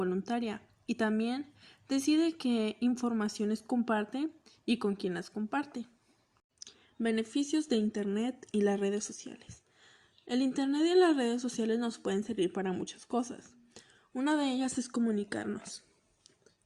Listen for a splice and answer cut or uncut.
uncut